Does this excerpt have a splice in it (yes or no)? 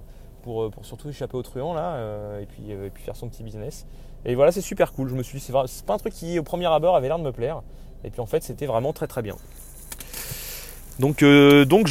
no